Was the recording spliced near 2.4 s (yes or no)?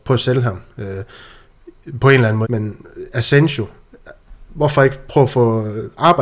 yes